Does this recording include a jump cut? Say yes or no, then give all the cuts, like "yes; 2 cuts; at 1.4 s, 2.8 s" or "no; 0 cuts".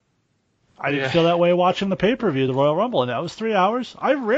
no; 0 cuts